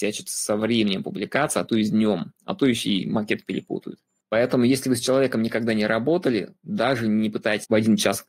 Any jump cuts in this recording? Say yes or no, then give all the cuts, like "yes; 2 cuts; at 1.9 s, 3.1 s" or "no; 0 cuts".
no; 0 cuts